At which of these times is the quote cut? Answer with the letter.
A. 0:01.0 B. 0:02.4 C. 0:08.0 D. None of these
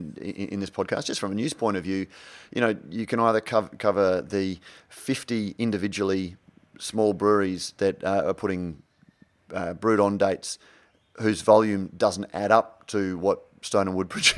D